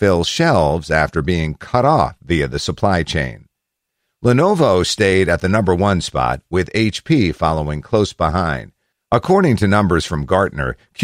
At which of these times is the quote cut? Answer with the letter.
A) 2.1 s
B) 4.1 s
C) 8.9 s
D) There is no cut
C